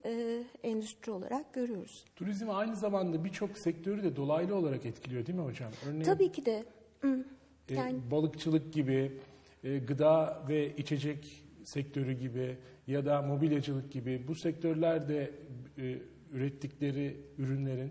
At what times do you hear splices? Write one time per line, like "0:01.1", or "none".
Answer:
0:02.1